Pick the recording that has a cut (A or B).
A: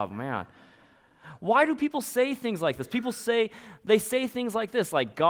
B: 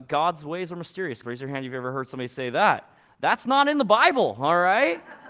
B